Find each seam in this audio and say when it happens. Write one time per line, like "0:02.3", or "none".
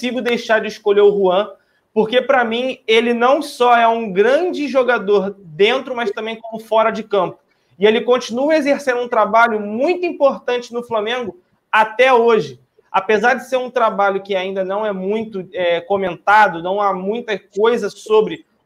none